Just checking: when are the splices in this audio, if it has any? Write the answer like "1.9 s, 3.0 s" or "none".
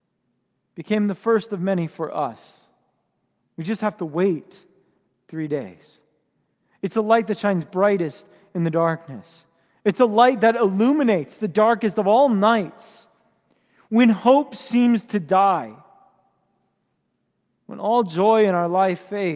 3.4 s